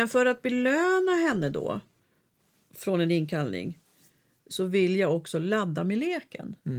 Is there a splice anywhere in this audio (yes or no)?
no